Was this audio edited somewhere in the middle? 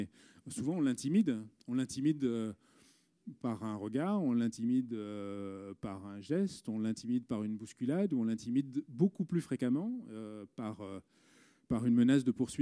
no; 0 cuts

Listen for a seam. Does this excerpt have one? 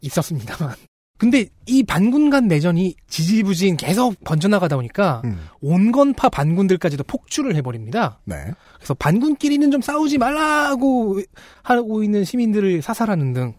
no; 0 cuts

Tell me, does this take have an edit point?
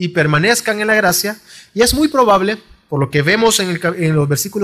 no; 0 cuts

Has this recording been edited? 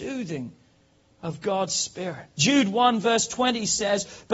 yes; 1 cut; at 2.3 s

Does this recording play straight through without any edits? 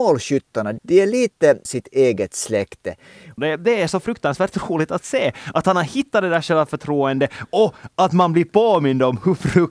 no; 2 cuts; at 1.6 s, 3.4 s

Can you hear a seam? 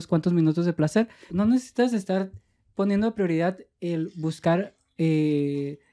yes; 1 cut; at 1.3 s

